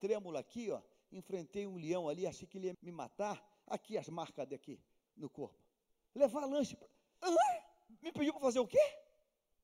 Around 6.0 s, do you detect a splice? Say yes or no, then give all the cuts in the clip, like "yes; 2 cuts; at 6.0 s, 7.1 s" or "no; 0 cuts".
no; 2 cuts; at 2.7 s, 7.2 s